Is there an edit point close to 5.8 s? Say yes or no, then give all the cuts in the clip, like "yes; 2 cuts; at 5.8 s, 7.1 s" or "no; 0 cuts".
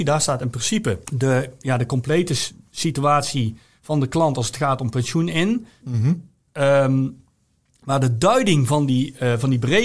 yes; 2 cuts; at 1.0 s, 5.8 s